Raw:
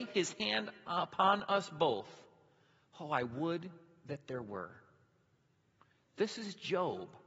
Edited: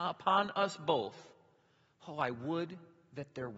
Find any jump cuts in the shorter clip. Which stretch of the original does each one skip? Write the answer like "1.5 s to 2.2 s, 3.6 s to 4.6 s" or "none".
none